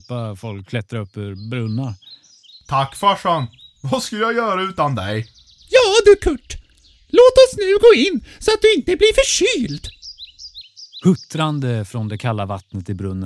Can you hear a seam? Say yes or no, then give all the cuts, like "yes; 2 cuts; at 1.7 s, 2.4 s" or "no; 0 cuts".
no; 0 cuts